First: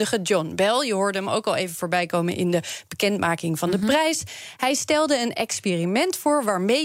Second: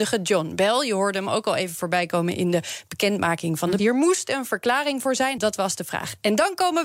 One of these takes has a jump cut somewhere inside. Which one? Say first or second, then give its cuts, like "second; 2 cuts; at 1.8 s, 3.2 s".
second; 2 cuts; at 3.8 s, 5.4 s